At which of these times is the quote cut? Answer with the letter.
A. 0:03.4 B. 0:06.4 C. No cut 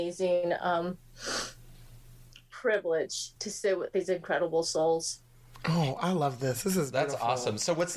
A